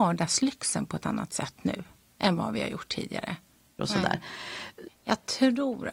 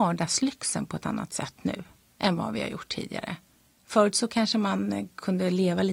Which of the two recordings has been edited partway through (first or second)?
first